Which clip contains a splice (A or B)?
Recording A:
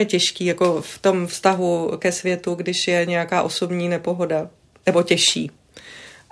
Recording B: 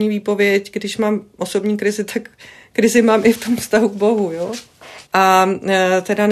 B